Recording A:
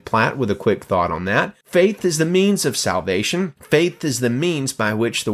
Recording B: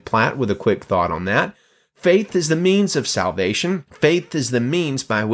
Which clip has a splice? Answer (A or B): A